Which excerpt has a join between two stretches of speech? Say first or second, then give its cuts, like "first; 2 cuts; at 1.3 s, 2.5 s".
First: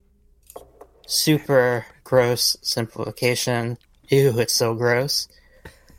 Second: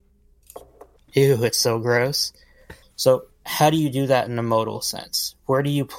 second; 2 cuts; at 1.0 s, 2.8 s